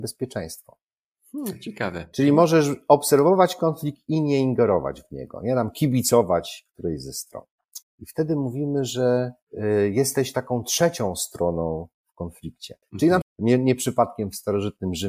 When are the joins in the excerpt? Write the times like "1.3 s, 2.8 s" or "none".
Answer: 7.8 s, 13.2 s

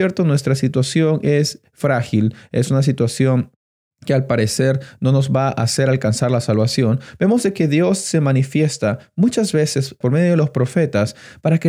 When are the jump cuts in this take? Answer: 10.0 s

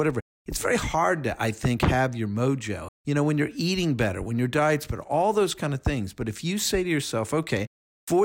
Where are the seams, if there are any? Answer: 2.9 s

